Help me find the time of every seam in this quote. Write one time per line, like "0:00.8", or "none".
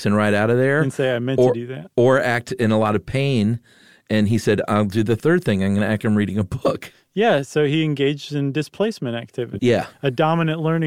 0:06.0
0:09.6